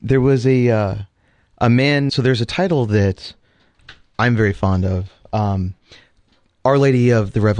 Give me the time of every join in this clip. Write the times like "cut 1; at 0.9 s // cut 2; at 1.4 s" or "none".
cut 1; at 2.1 s